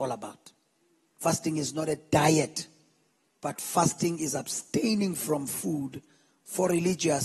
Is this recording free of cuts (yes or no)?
no